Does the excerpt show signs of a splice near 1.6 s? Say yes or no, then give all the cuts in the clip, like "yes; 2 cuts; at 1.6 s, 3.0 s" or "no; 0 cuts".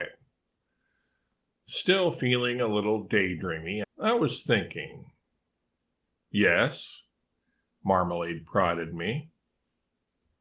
no; 1 cut; at 3.8 s